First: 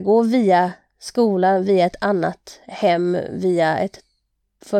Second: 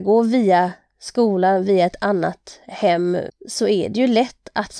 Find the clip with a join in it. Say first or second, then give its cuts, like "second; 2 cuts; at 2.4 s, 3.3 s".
second; 1 cut; at 3.3 s